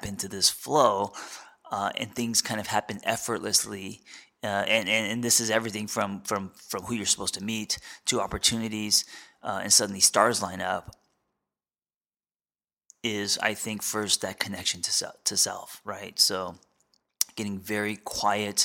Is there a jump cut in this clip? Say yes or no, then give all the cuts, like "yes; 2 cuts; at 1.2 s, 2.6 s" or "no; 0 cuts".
no; 0 cuts